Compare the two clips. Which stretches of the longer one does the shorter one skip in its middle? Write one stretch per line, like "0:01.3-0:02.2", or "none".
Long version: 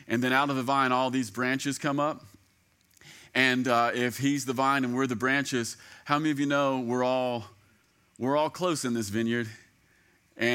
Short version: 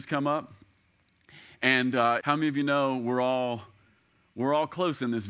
0:03.9-0:06.0